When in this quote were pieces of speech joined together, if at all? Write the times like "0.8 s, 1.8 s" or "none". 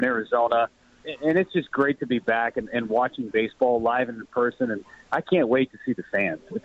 1.0 s